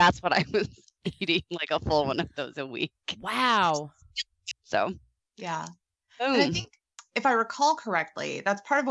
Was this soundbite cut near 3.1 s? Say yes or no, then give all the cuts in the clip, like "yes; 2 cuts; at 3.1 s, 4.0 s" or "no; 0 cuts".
no; 1 cut; at 4.5 s